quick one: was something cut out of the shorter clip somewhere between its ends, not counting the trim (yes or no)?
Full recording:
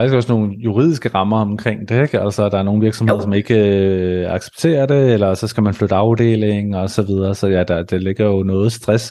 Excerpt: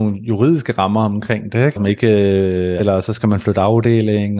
yes